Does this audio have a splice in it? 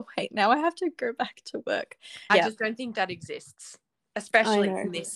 yes; 1 cut; at 2.3 s

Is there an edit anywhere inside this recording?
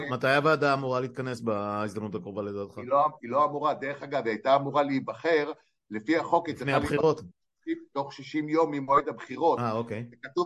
no; 0 cuts

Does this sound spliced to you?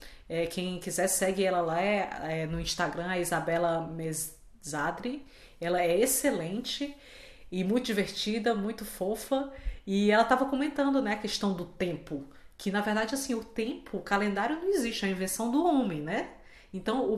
no; 0 cuts

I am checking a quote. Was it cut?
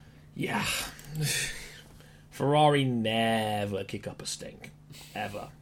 no; 0 cuts

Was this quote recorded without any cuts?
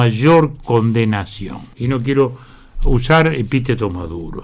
yes; 0 cuts

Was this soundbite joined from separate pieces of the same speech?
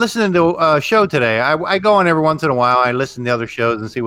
no; 0 cuts

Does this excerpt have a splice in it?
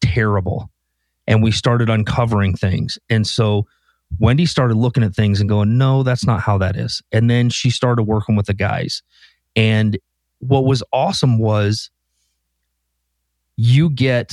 no; 0 cuts

